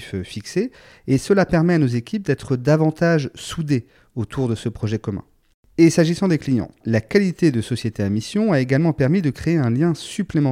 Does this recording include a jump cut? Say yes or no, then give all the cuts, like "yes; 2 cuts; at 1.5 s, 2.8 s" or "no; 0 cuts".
yes; 1 cut; at 6.8 s